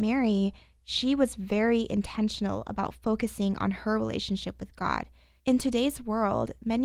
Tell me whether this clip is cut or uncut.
cut